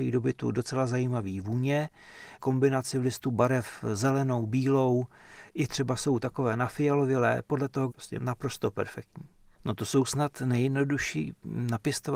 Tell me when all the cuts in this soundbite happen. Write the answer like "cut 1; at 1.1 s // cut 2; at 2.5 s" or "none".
cut 1; at 7.9 s // cut 2; at 9.6 s